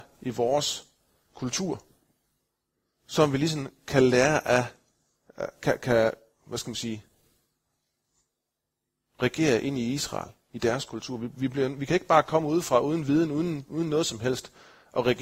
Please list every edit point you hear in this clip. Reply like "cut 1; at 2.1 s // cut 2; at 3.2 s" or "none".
none